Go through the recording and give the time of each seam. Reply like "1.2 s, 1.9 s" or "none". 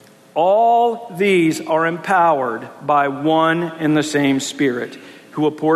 none